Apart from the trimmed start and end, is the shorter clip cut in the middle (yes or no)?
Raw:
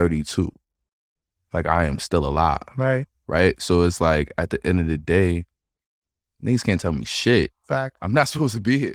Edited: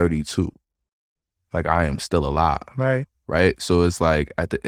no